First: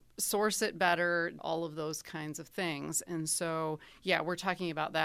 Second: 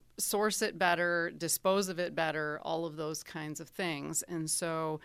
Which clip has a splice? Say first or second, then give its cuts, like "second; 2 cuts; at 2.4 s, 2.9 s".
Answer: first; 1 cut; at 1.4 s